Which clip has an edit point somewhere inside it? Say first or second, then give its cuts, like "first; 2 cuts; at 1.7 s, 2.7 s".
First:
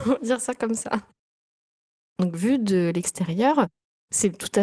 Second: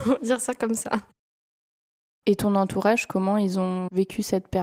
first; 1 cut; at 2.1 s